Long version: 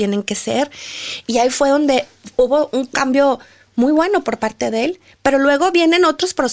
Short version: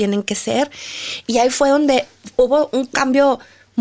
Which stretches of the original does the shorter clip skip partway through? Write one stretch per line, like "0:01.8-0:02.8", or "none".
none